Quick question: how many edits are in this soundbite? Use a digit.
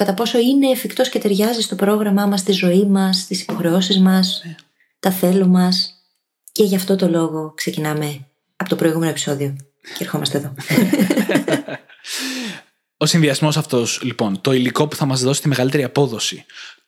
0